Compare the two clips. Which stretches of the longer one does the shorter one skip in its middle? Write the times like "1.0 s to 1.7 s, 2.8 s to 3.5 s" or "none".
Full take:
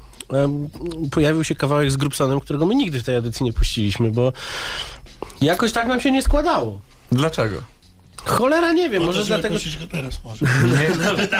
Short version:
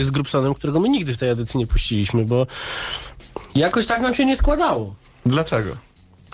none